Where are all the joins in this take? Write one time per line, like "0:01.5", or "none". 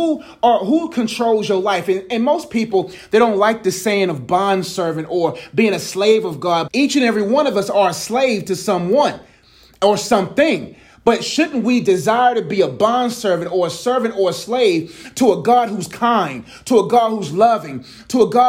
0:06.7